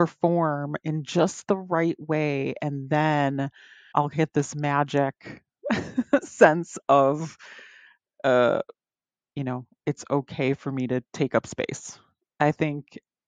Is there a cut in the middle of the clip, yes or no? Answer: yes